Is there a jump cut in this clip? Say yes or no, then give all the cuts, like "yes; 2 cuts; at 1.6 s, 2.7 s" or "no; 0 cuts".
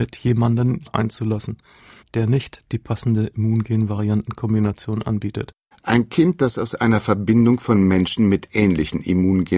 yes; 1 cut; at 5.7 s